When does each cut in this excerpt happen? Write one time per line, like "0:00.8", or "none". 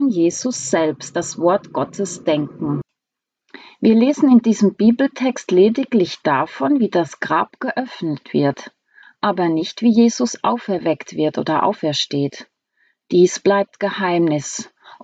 none